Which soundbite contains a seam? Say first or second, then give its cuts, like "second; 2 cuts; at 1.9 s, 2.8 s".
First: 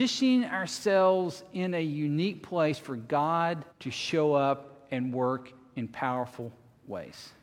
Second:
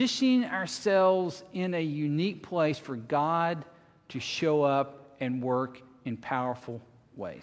first; 1 cut; at 3.7 s